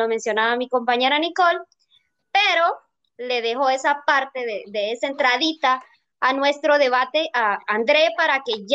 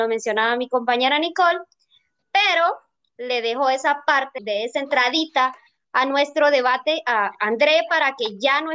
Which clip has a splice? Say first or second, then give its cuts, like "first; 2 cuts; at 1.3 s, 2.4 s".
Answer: second; 1 cut; at 4.4 s